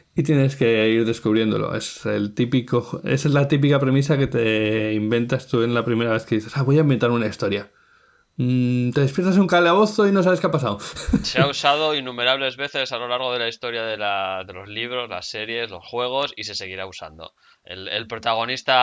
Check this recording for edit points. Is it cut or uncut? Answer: uncut